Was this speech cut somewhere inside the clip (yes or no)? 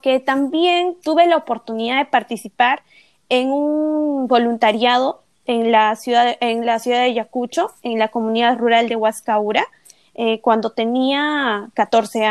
no